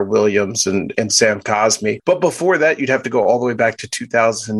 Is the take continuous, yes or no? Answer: yes